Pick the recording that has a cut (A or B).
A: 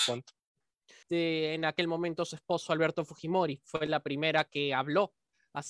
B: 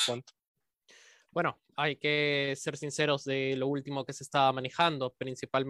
A